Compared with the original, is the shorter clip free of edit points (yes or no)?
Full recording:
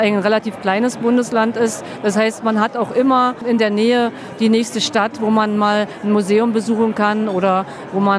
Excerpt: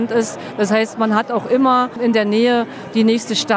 yes